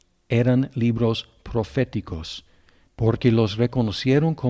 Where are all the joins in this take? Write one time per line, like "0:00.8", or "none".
0:02.9